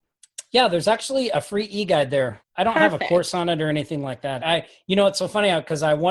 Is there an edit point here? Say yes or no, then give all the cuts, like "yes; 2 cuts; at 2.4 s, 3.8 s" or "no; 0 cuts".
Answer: yes; 2 cuts; at 2.4 s, 4.4 s